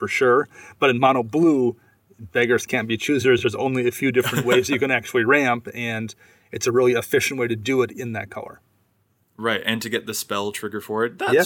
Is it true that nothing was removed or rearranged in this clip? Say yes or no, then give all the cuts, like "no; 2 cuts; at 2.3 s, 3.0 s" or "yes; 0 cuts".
yes; 0 cuts